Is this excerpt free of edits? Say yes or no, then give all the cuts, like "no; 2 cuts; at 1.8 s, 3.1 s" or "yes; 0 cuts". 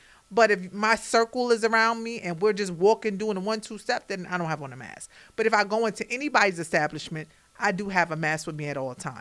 yes; 0 cuts